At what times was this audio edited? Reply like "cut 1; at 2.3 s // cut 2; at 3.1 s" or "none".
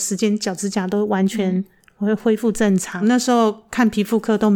cut 1; at 3.0 s